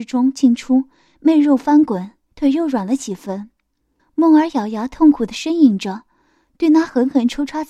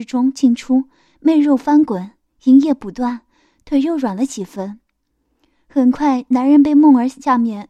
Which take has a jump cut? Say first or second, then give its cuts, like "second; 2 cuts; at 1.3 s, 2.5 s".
first; 2 cuts; at 2.3 s, 4.0 s